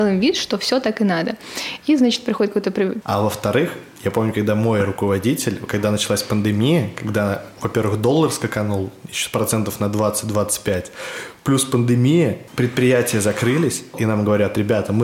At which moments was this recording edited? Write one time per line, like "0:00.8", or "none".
0:03.0
0:12.5
0:13.9